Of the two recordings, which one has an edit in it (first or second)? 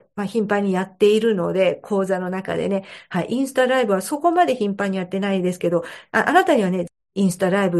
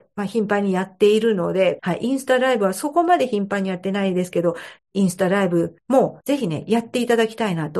second